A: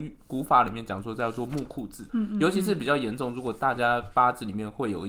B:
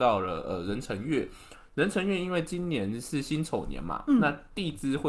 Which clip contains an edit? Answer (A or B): A